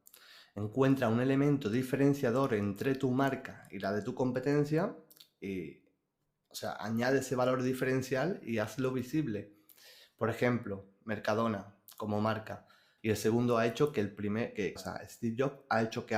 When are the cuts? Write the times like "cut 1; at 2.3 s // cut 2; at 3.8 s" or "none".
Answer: cut 1; at 13.0 s // cut 2; at 14.8 s